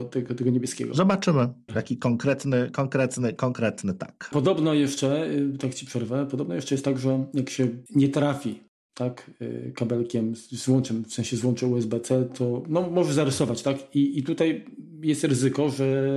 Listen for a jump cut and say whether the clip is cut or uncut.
cut